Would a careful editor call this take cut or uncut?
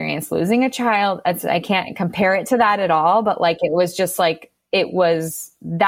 uncut